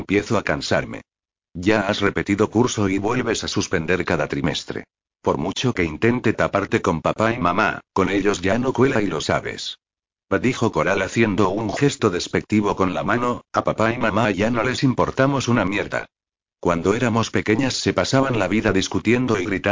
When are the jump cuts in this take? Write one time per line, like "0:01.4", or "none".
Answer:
0:05.2